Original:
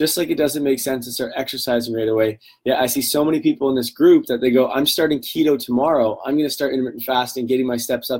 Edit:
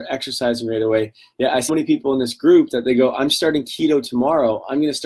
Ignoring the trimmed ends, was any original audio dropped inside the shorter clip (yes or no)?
yes